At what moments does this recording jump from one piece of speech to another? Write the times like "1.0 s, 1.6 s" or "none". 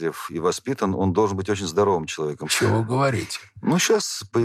2.4 s